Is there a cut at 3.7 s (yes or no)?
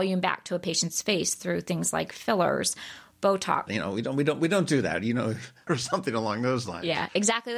yes